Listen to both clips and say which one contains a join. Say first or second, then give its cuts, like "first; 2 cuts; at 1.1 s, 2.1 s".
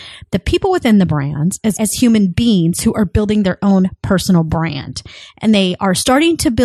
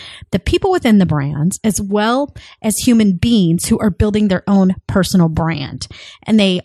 first; 1 cut; at 1.7 s